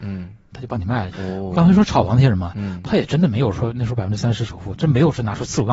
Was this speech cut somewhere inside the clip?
yes; 1 cut; at 1.1 s

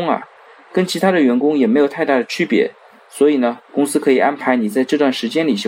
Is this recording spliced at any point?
no; 0 cuts

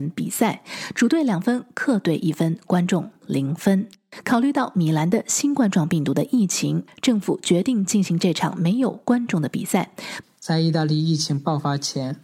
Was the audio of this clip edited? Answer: yes; 1 cut; at 10.2 s

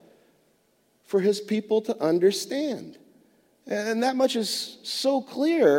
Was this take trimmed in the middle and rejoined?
no; 0 cuts

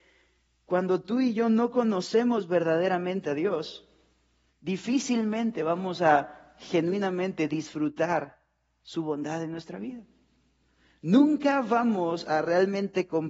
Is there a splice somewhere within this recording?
yes; 1 cut; at 4.5 s

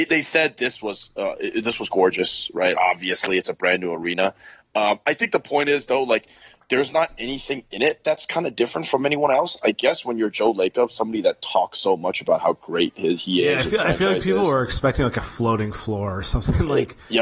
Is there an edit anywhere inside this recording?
no; 0 cuts

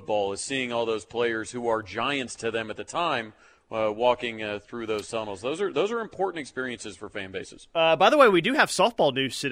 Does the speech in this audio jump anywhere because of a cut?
no; 0 cuts

